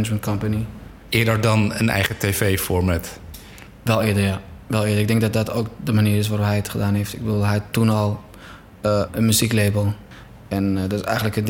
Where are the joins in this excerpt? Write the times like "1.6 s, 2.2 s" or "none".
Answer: 9.1 s